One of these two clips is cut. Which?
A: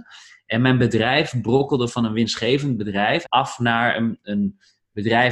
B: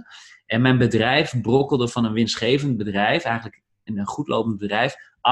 A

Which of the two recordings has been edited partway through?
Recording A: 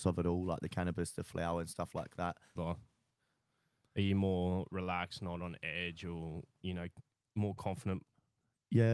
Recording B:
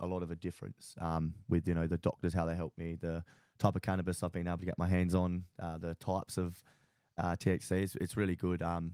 A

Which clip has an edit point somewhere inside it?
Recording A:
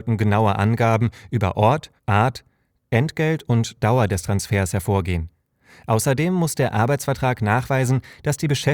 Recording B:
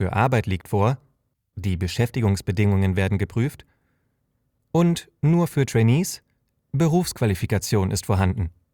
A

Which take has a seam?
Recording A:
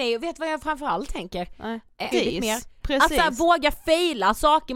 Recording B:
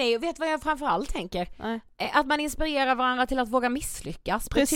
A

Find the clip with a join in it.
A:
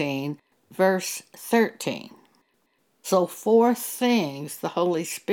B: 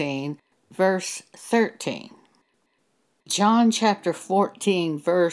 A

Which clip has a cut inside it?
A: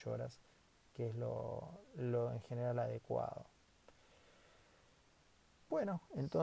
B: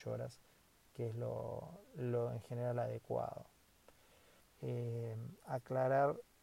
B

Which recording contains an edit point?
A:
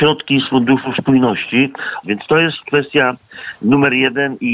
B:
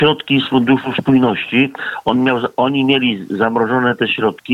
A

